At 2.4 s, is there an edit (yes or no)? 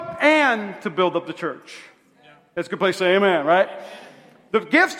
no